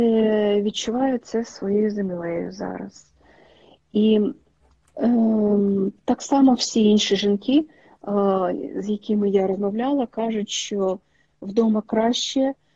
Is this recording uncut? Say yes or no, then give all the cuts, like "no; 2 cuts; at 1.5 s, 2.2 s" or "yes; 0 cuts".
yes; 0 cuts